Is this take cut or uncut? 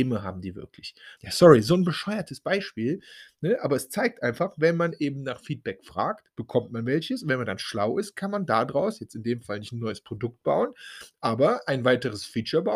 cut